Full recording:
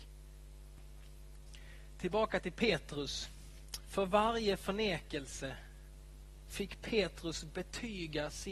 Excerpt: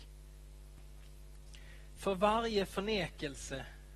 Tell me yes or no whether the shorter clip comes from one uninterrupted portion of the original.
no